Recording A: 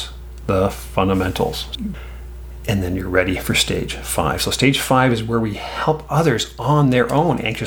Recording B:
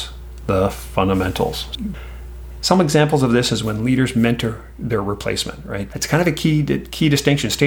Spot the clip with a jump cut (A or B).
B